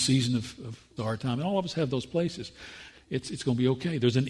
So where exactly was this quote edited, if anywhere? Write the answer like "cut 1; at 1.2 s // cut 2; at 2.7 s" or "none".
cut 1; at 1.0 s // cut 2; at 2.9 s